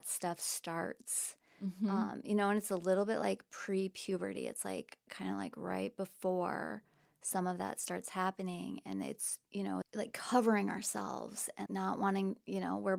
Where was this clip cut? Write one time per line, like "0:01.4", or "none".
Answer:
0:09.8
0:11.7